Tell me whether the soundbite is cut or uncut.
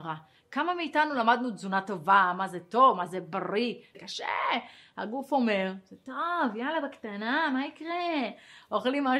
cut